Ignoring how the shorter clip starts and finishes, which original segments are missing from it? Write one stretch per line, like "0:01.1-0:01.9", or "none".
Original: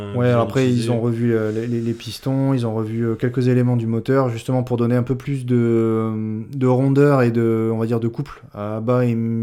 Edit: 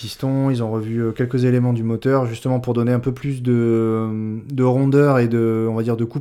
none